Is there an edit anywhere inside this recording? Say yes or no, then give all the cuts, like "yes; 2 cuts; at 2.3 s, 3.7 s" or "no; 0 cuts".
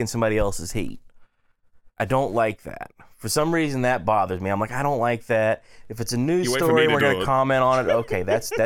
yes; 1 cut; at 1.9 s